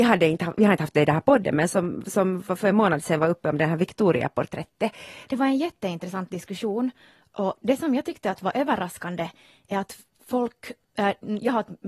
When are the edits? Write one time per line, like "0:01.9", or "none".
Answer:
0:05.3

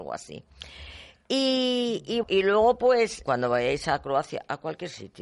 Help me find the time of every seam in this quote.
0:02.2
0:03.2

